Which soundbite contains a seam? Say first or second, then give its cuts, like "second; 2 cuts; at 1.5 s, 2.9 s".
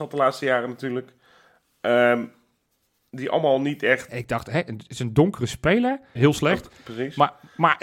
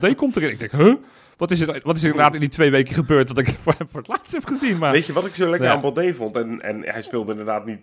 first; 2 cuts; at 4.1 s, 6.2 s